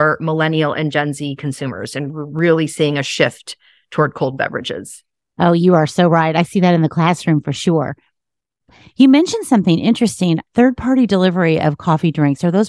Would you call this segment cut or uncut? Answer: cut